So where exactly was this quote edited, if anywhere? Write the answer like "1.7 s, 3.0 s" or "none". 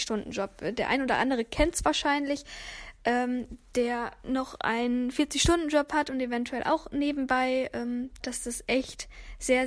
8.2 s

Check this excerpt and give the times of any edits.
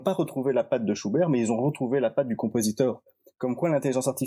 none

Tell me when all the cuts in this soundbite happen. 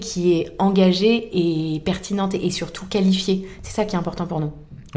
none

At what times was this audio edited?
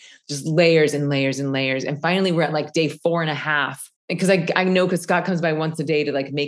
4.0 s

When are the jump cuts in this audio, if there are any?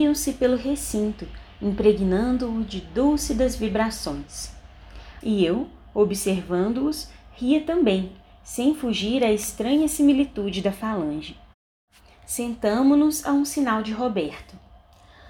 5.2 s

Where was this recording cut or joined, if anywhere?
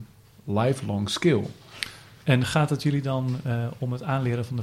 none

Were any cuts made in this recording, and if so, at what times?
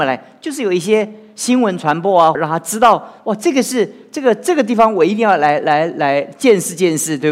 2.3 s

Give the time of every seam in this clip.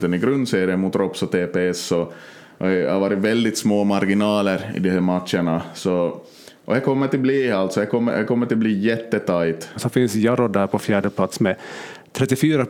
9.8 s

